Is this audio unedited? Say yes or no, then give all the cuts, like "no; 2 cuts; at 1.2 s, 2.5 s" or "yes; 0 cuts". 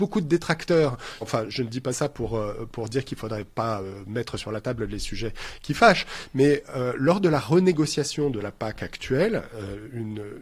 no; 1 cut; at 1.2 s